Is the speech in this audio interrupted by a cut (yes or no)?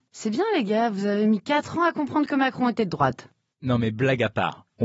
no